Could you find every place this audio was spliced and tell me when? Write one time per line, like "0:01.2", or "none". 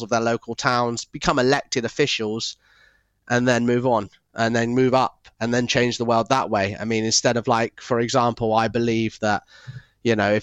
none